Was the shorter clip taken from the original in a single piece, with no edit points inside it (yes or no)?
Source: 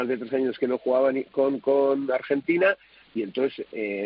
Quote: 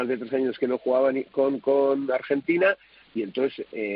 yes